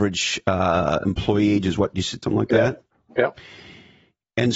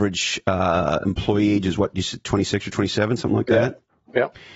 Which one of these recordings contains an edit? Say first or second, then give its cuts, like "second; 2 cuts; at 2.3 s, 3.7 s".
first; 1 cut; at 2.2 s